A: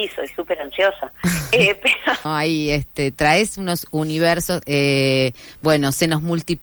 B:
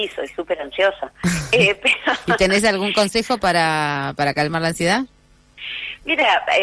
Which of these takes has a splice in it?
A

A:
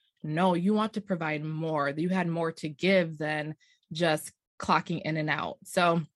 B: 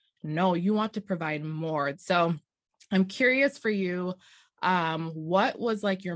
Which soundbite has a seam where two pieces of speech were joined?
B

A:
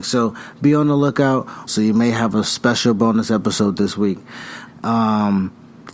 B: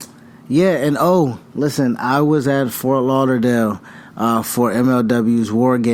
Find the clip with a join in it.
A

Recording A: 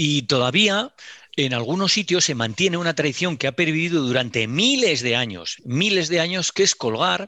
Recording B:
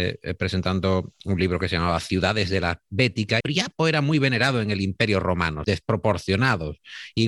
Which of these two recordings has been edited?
B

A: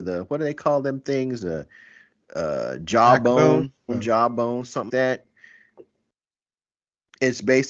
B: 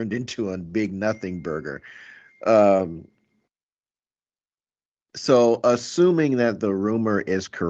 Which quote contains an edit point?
A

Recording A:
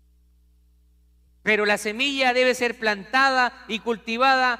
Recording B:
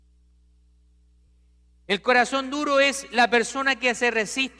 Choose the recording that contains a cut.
A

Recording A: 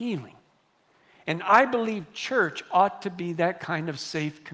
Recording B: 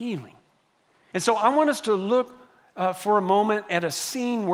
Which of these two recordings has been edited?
B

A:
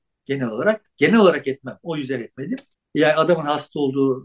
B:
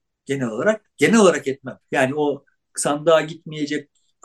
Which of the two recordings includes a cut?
B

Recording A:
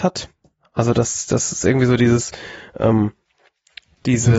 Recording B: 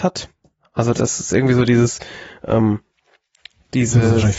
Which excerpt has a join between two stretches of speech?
B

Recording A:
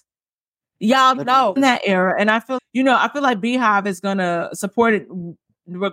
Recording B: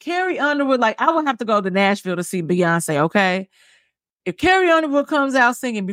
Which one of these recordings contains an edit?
A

